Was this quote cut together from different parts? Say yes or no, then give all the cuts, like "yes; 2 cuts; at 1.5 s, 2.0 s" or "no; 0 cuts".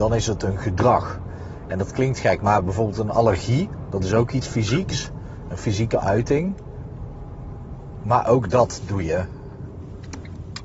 no; 0 cuts